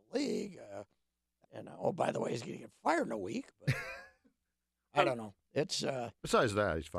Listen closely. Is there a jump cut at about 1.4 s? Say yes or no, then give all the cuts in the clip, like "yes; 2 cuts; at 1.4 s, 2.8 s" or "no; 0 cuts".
yes; 1 cut; at 1.4 s